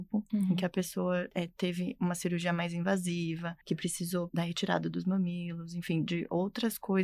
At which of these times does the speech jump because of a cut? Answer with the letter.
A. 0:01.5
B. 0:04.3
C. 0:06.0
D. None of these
B